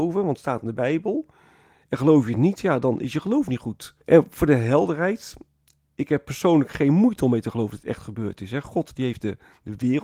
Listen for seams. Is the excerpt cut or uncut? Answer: cut